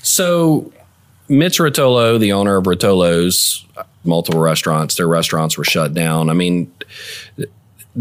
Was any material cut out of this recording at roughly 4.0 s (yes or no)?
yes